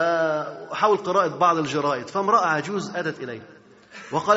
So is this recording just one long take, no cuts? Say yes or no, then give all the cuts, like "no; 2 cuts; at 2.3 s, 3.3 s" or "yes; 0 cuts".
yes; 0 cuts